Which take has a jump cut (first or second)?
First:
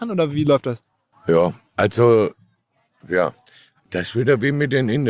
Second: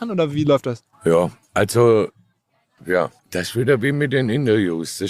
second